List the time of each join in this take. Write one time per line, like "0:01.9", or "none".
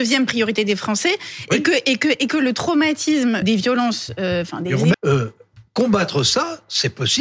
0:03.4
0:04.9